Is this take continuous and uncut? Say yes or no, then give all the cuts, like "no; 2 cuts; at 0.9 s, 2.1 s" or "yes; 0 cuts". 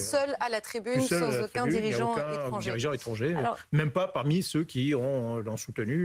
yes; 0 cuts